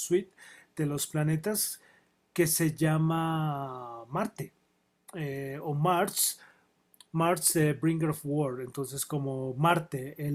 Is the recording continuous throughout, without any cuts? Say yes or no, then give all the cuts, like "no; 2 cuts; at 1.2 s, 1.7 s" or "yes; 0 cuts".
yes; 0 cuts